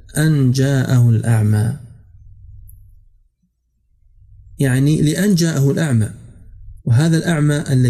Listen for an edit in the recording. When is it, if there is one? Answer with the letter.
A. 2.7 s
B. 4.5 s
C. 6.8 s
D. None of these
C